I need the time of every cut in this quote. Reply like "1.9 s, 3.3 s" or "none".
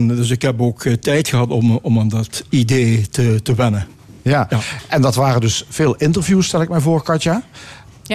none